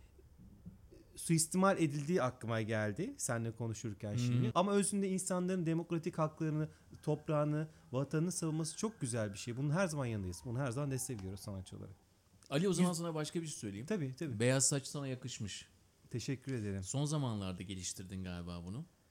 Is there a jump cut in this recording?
yes; 1 cut; at 4.5 s

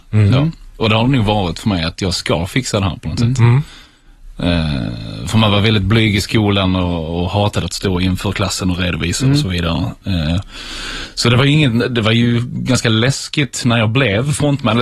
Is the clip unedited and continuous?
yes; 0 cuts

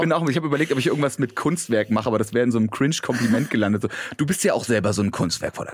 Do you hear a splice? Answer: no; 0 cuts

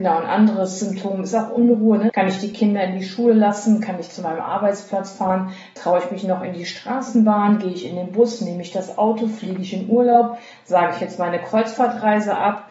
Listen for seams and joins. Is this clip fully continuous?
no; 1 cut; at 2.1 s

